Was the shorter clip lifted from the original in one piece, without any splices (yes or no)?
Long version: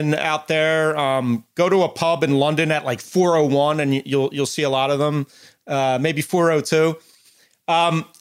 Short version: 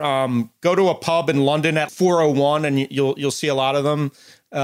no